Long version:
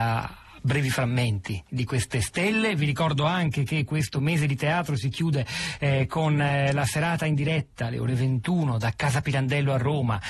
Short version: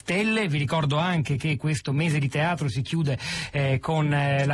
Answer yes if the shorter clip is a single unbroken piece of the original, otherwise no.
yes